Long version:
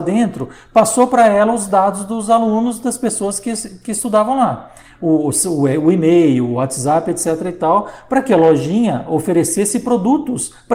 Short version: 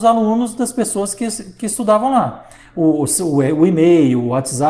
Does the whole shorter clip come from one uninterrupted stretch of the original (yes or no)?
yes